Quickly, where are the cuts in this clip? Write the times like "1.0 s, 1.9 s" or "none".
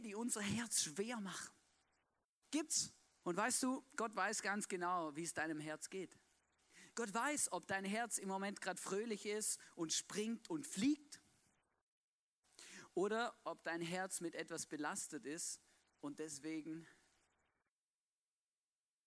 3.2 s

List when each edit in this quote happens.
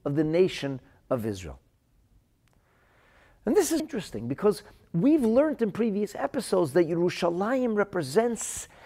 3.8 s

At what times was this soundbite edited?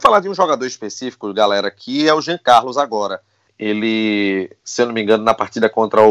3.5 s

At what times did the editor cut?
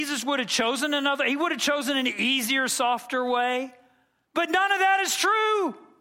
4.2 s

